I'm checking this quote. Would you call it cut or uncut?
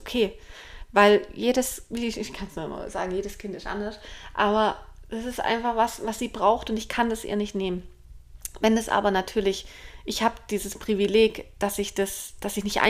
uncut